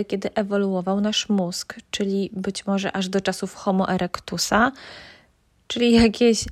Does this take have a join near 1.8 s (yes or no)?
no